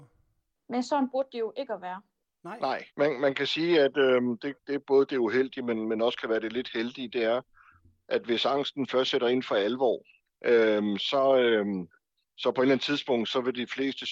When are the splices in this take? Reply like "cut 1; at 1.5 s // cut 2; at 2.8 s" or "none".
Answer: cut 1; at 2.9 s // cut 2; at 11.0 s